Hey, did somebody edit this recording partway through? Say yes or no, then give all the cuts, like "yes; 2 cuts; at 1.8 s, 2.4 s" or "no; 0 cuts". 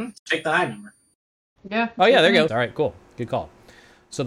yes; 1 cut; at 2.5 s